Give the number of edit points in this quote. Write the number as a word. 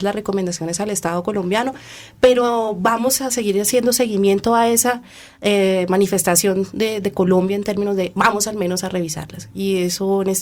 zero